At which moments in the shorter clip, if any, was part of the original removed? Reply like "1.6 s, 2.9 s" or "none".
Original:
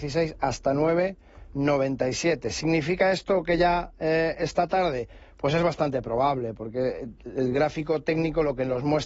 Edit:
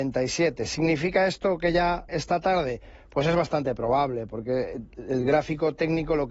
2.1 s